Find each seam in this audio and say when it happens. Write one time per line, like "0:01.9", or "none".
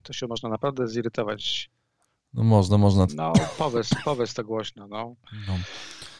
0:03.1